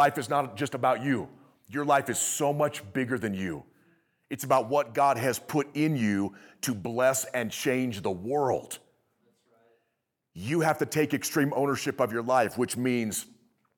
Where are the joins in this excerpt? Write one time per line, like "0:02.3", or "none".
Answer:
none